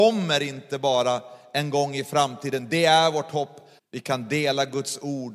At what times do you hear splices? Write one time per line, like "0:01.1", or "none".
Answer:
0:03.8